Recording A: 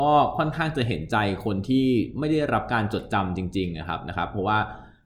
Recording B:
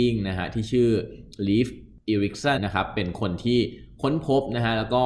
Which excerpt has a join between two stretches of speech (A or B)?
B